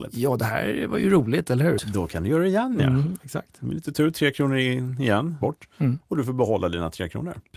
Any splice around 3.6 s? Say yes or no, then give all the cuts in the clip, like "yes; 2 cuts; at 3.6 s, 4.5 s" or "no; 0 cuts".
no; 2 cuts; at 1.8 s, 5.4 s